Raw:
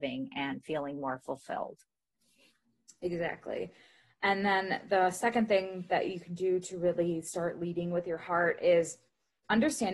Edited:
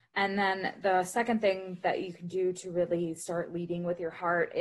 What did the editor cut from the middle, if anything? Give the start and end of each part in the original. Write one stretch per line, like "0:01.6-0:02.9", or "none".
none

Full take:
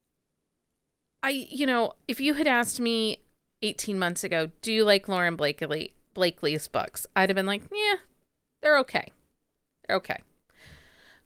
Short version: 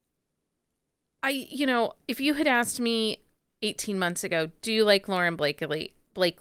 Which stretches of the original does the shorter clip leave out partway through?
none

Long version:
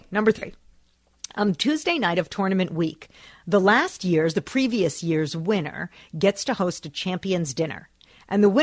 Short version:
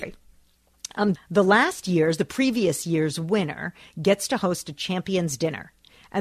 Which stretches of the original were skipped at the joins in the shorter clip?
0:01.6-0:03.3

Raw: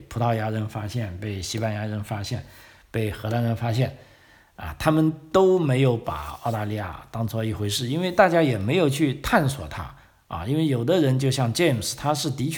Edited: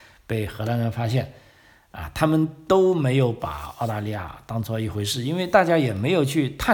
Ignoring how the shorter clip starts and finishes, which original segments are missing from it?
none

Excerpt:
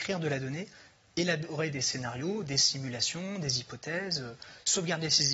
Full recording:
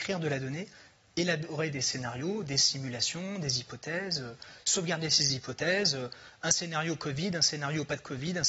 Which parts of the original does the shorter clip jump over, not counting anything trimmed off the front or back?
none

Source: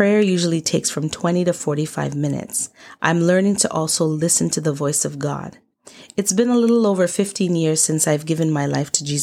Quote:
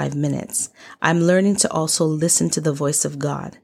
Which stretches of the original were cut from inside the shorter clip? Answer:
none

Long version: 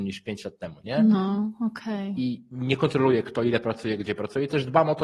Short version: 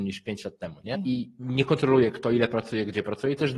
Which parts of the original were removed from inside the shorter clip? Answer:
0:00.9-0:02.1

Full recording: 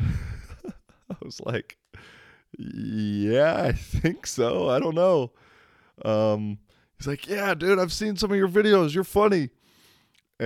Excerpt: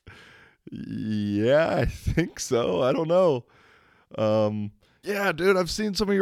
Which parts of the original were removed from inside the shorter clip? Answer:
0:06.9-0:07.3

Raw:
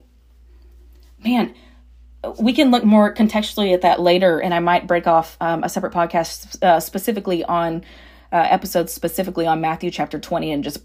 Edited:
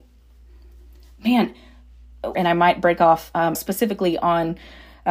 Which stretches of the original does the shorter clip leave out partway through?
0:02.3-0:04.4
0:05.6-0:06.8

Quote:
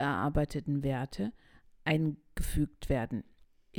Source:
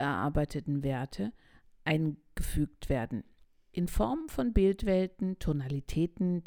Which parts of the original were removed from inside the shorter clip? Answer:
none

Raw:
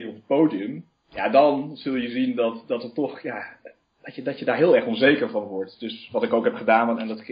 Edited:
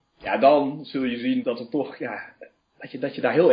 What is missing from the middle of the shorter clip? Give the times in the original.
0:02.3-0:02.7

